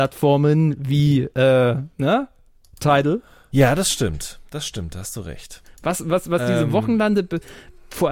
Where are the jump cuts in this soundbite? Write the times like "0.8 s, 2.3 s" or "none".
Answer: 3.5 s, 5.6 s